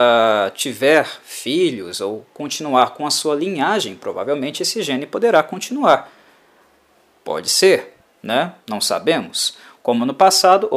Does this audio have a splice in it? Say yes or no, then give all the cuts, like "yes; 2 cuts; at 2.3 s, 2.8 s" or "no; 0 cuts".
no; 0 cuts